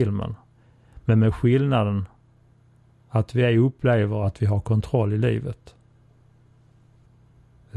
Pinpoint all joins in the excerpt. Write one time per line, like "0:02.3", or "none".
none